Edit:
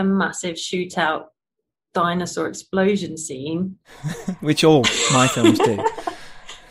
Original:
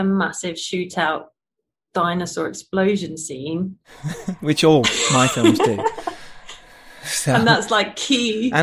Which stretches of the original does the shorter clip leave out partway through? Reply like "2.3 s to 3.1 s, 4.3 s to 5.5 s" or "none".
none